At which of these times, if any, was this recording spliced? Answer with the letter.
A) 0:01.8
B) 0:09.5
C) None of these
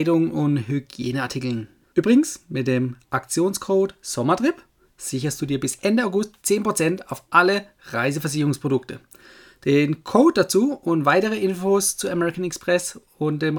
A